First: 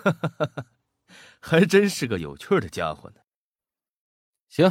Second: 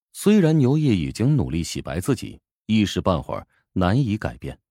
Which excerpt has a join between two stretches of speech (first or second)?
second